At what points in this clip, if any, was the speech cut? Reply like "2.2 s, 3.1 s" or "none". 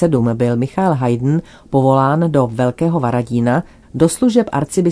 3.8 s